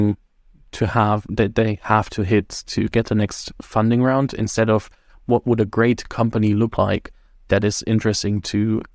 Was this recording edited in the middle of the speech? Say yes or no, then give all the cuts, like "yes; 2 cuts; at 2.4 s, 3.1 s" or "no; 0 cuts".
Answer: no; 0 cuts